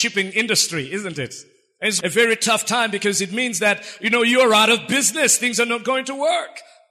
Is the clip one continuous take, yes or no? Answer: no